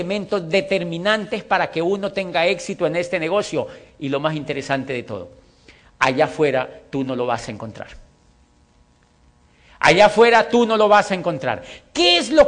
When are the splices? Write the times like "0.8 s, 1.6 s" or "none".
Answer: none